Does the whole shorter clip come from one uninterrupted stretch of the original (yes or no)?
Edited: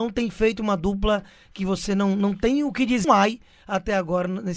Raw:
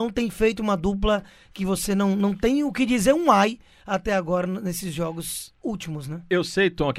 no